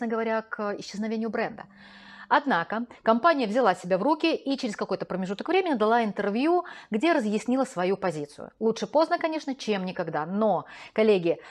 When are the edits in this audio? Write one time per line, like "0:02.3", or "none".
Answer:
none